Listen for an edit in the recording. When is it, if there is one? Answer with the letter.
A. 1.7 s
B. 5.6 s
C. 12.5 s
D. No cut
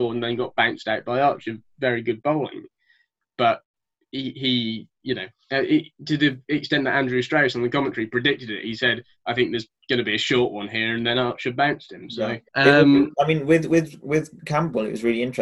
C